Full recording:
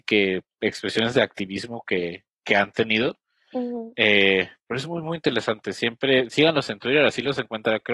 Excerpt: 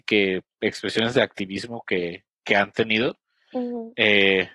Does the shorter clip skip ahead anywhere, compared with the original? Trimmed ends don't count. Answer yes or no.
no